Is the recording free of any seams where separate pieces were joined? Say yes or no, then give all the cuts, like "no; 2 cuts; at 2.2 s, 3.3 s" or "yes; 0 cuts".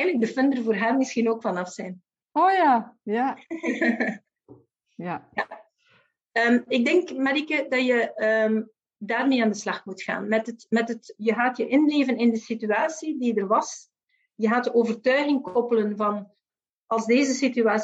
yes; 0 cuts